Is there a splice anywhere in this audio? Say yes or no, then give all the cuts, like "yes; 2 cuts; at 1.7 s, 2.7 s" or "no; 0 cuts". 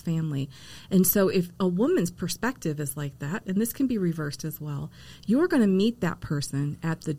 no; 0 cuts